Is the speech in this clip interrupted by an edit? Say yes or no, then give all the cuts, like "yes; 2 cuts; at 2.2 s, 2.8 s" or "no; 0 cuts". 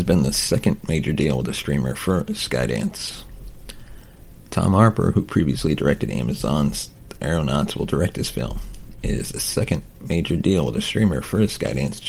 no; 0 cuts